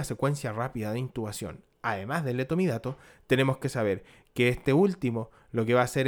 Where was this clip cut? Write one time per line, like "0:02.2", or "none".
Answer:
none